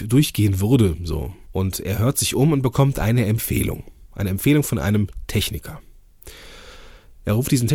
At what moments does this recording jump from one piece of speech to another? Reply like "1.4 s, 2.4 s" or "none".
1.4 s